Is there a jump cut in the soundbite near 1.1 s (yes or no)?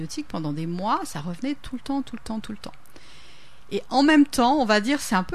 no